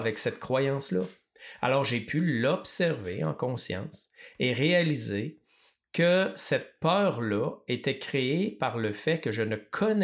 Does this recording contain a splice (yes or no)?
no